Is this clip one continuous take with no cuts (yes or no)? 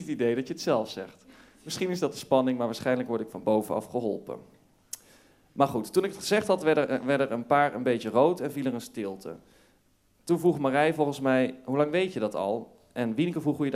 yes